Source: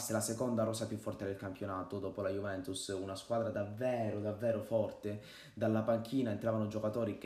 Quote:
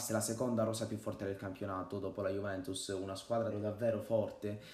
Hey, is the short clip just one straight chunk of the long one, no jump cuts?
no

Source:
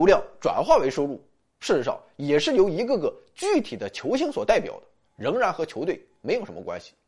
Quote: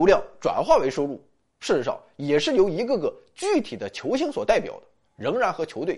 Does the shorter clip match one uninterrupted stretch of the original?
yes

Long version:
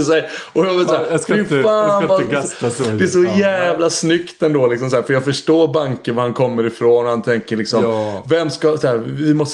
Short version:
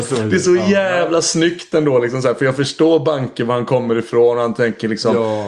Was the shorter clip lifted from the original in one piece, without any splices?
yes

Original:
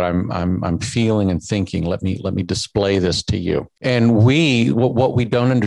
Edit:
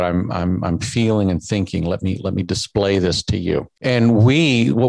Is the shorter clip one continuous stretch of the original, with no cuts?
yes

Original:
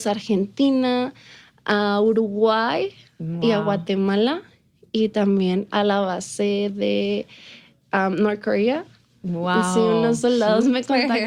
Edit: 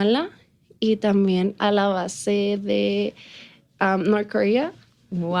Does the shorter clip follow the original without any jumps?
yes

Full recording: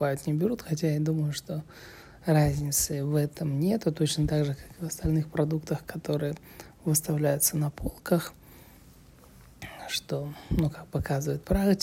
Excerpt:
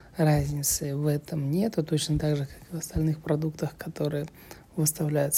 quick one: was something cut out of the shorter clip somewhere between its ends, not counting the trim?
no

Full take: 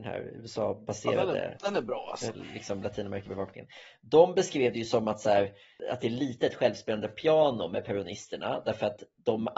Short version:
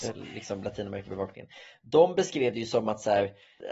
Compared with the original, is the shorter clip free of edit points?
yes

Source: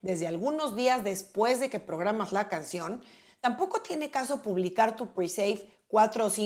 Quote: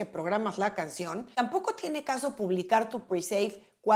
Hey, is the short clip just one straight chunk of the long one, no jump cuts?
no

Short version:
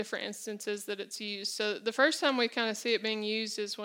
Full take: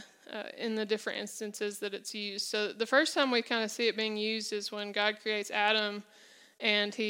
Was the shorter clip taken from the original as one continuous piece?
yes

